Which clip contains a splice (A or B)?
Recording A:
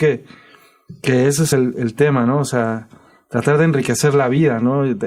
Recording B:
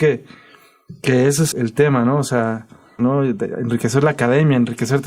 B